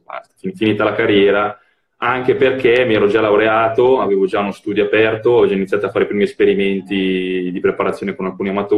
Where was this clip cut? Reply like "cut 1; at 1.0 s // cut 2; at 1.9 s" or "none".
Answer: none